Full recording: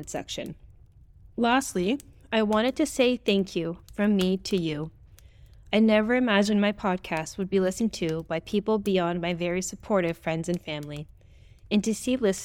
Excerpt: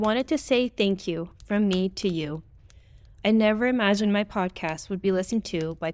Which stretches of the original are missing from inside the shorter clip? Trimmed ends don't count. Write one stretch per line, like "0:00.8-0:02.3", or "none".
none